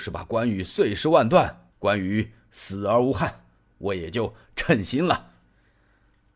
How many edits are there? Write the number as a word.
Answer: one